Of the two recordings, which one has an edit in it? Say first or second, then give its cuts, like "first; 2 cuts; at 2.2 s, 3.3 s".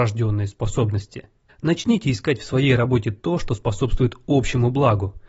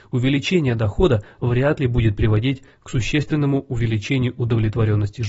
first; 1 cut; at 1.5 s